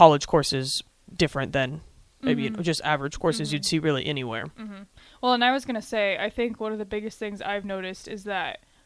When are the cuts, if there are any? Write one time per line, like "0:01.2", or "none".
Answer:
none